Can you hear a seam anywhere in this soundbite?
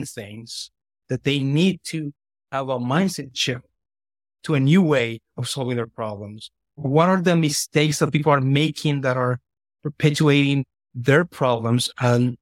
no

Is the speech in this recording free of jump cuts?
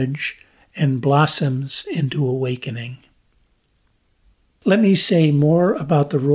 yes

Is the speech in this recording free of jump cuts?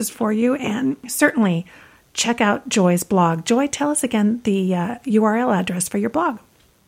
yes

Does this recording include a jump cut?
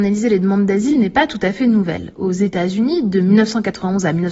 no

